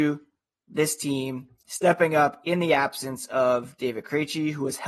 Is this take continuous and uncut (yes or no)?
yes